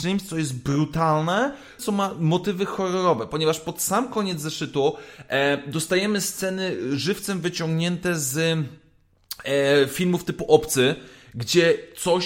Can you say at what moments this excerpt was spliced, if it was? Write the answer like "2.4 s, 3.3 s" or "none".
1.8 s